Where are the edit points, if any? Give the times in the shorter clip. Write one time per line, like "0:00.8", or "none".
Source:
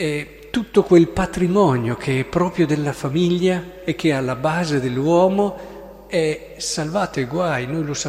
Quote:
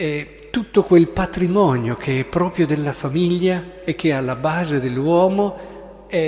none